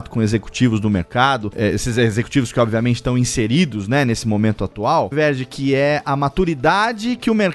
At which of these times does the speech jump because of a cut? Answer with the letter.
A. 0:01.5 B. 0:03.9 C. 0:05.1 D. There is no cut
C